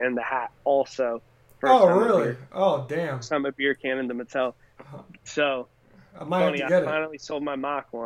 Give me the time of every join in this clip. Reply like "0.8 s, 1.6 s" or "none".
none

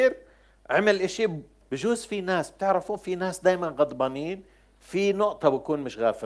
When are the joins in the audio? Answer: 1.6 s

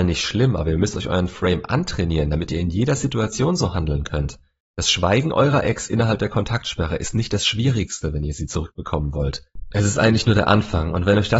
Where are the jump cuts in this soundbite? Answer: none

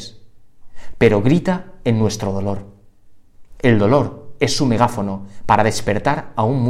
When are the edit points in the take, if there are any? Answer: 0.9 s

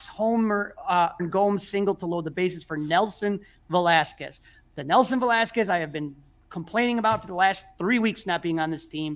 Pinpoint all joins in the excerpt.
1.2 s

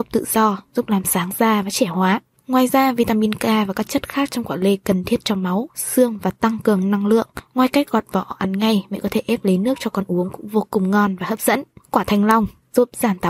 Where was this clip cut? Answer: none

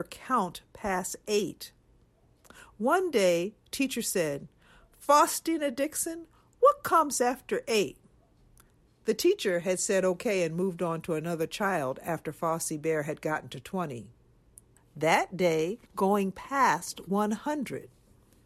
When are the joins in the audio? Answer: 8.9 s, 14.8 s, 15.9 s

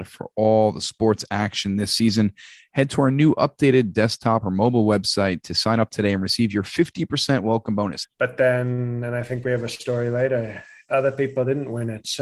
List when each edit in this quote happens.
8.0 s

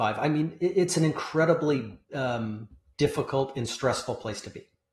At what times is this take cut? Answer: 2.1 s

